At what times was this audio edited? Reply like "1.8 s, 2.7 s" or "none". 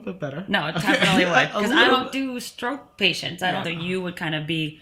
3.6 s